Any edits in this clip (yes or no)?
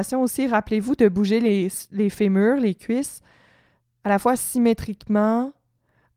no